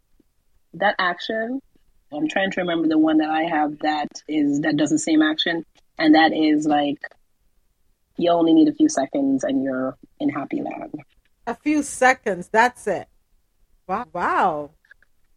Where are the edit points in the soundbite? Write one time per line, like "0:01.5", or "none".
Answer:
0:02.1
0:14.0